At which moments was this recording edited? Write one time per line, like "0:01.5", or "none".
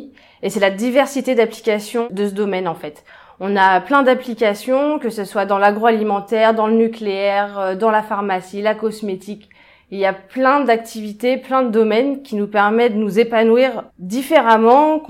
0:13.9